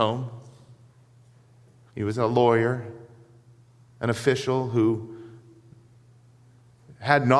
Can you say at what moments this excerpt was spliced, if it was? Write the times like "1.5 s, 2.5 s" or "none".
1.9 s